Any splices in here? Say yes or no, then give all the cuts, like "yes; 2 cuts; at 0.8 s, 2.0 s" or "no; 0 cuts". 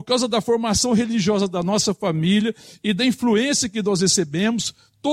no; 0 cuts